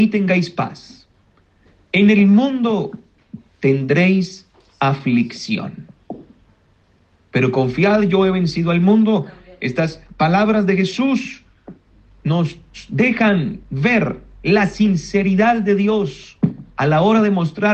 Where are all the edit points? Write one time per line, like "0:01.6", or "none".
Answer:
none

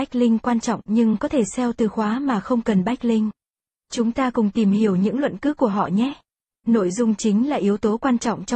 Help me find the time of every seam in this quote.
0:03.7

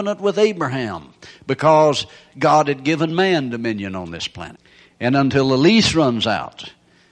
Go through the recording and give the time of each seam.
none

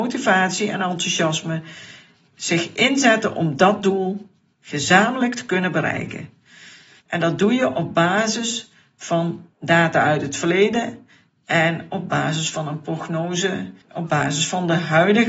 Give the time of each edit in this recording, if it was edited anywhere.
0:07.0
0:09.5
0:13.8

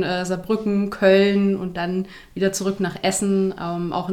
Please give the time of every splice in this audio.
none

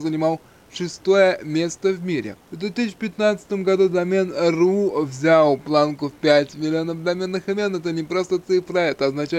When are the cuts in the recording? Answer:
0:02.4

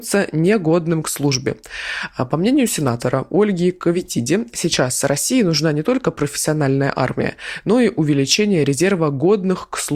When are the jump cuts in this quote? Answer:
none

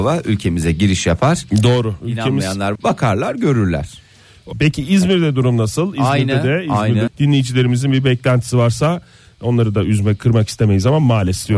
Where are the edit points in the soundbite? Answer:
0:02.8
0:04.5
0:07.1

